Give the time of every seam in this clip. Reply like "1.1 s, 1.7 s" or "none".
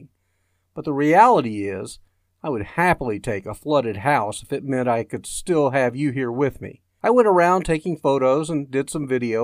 7.0 s

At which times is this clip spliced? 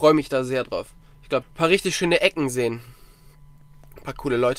1.4 s

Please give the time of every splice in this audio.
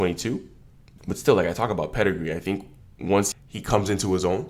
1.0 s, 3.3 s

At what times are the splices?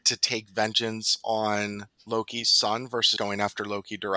1.9 s, 3.2 s

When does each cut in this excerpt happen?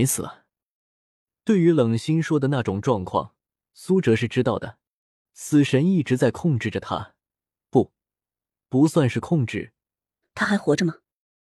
5.2 s, 10.2 s

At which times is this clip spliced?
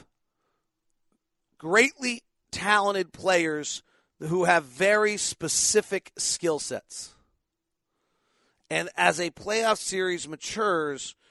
none

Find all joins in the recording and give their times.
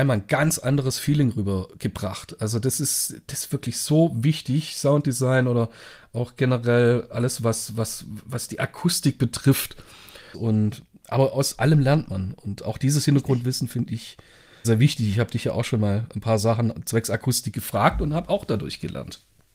10.3 s, 14.6 s

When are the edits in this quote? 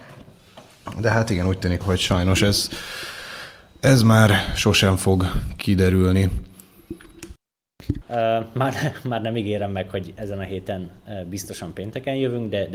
1.8 s, 8.0 s

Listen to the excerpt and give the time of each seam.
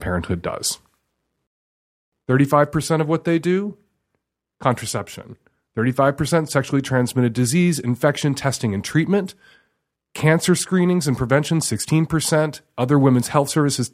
none

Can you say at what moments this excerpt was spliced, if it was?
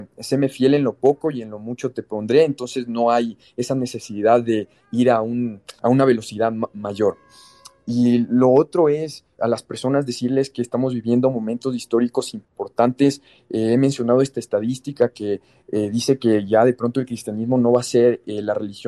none

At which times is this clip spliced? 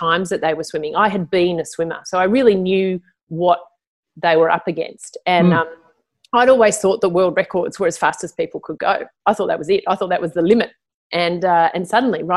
none

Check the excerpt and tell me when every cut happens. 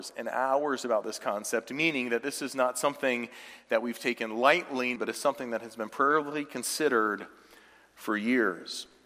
5.0 s

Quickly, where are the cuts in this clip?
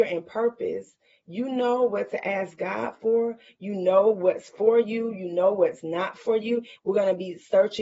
6.8 s

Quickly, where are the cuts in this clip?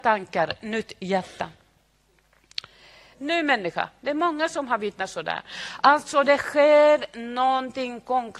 3.1 s

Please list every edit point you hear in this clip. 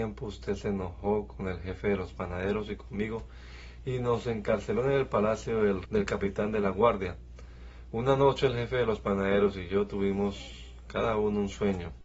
5.8 s

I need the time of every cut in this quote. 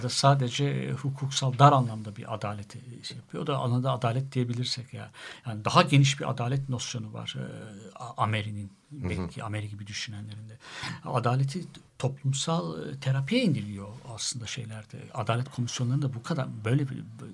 11.9 s

